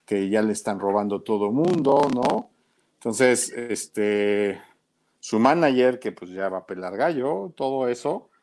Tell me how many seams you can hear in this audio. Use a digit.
0